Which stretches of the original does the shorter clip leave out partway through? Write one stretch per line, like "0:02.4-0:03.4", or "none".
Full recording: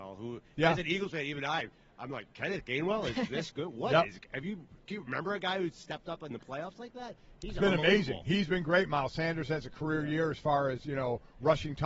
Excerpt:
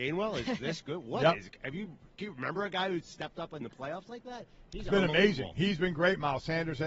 none